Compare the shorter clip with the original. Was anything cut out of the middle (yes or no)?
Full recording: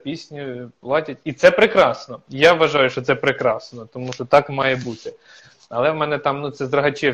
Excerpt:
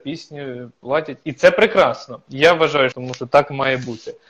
yes